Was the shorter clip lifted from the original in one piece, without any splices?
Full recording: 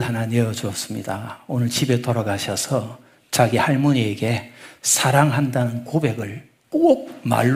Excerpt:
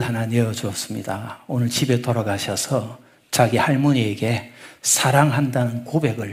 yes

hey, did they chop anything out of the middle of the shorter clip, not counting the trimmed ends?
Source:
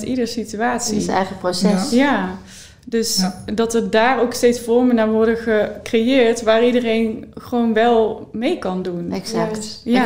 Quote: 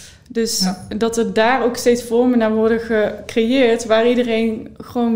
no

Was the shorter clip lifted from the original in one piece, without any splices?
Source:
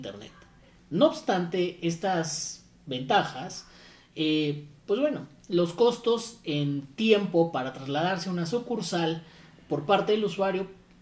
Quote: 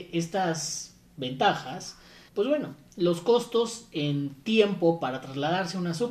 no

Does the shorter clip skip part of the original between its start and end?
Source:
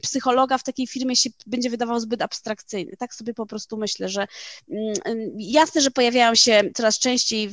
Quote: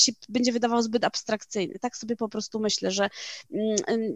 no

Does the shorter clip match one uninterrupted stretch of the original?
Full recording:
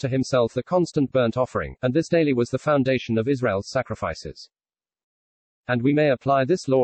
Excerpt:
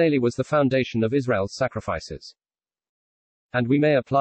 yes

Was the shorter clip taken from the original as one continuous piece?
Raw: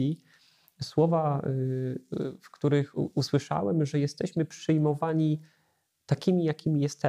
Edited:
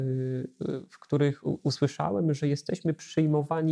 yes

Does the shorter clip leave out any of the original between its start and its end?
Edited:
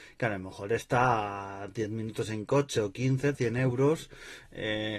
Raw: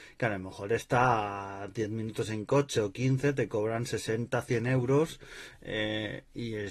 yes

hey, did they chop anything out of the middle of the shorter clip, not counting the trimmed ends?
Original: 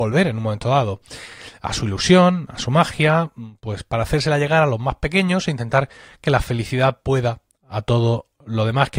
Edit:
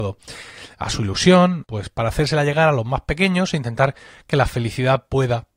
yes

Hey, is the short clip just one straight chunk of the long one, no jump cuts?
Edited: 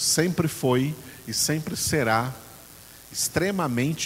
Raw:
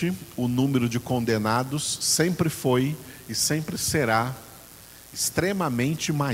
yes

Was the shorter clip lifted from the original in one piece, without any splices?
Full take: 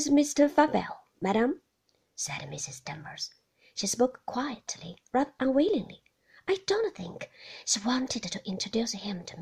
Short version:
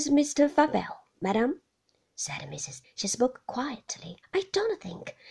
no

